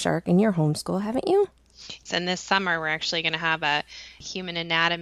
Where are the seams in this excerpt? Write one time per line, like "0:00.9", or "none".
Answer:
0:02.1